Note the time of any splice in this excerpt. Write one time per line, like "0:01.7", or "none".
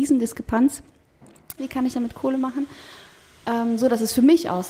0:01.6